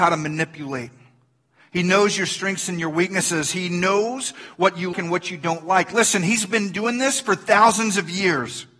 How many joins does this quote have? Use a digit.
1